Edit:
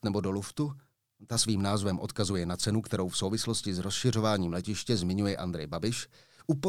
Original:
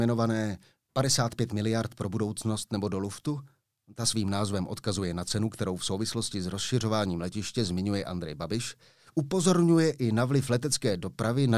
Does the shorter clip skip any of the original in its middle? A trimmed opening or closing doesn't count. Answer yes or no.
no